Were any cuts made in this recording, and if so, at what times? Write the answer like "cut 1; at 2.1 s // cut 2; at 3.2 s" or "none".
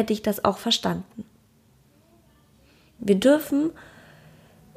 cut 1; at 3.0 s